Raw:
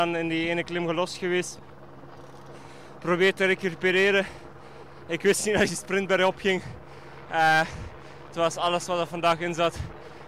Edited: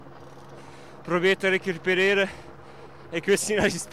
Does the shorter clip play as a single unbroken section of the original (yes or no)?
yes